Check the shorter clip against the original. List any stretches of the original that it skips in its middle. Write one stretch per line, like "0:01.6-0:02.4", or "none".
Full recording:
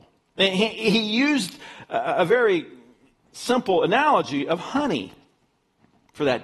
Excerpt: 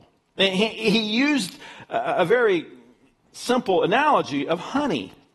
none